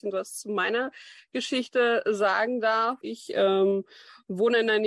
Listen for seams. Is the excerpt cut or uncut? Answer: cut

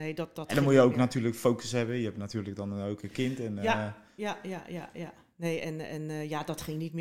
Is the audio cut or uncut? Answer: uncut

